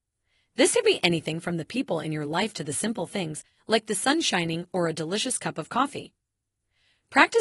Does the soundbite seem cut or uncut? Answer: uncut